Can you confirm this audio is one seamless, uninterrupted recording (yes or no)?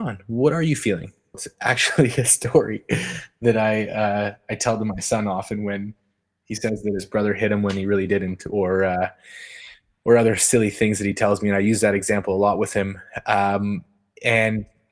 no